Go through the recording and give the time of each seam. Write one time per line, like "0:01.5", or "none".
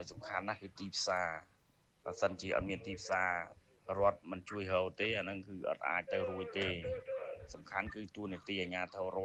none

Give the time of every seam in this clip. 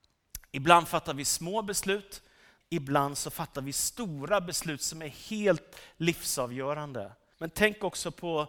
0:02.6
0:07.3

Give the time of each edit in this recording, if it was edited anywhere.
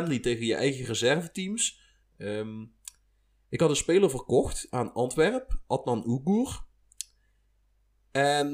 0:02.0

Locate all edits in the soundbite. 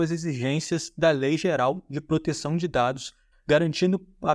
0:03.3

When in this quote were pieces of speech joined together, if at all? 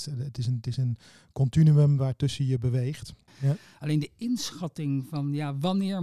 0:03.3

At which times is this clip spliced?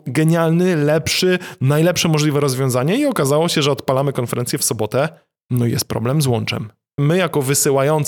0:07.0

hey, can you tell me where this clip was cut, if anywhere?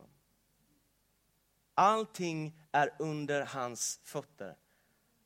none

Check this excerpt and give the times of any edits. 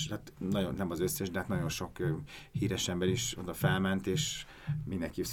none

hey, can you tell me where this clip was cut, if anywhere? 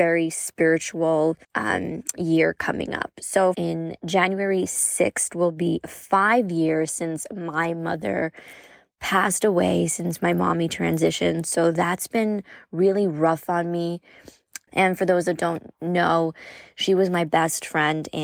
0:01.4
0:03.5
0:14.7

